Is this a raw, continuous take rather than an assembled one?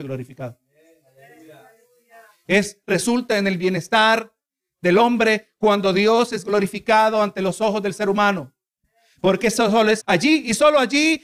no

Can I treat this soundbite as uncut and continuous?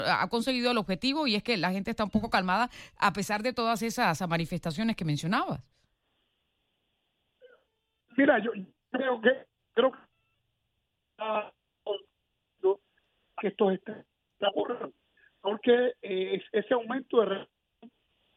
no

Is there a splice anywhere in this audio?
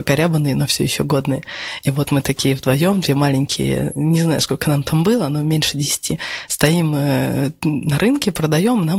no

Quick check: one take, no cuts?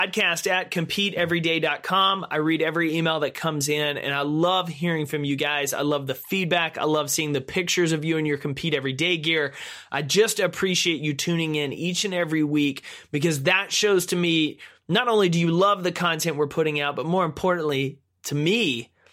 yes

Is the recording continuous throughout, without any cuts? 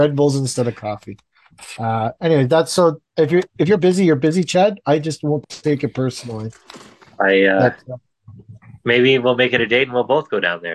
yes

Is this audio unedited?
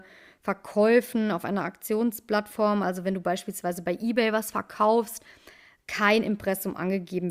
yes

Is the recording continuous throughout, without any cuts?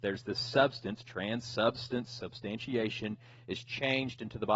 yes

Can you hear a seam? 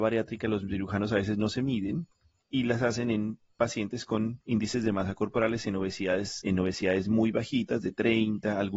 yes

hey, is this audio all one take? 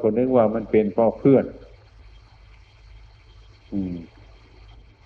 yes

